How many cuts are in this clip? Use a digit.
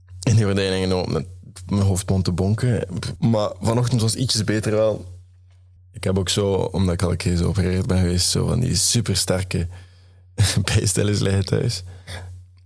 2